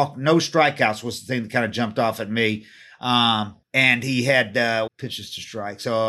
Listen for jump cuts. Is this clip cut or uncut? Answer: cut